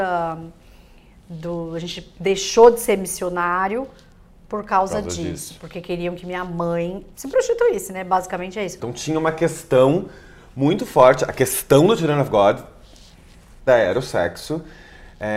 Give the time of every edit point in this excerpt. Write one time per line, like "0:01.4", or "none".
0:08.8
0:13.7